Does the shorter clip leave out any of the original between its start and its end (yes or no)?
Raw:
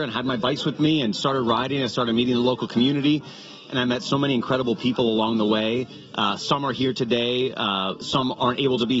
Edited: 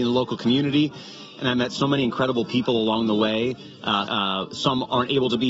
yes